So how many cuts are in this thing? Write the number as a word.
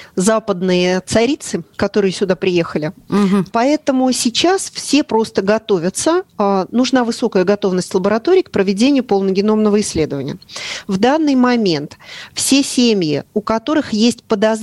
two